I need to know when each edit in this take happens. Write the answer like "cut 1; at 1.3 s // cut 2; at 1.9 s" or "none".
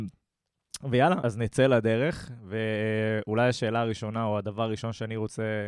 cut 1; at 1.2 s